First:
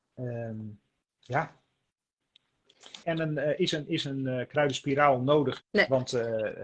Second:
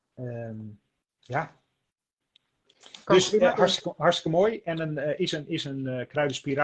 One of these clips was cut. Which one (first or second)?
first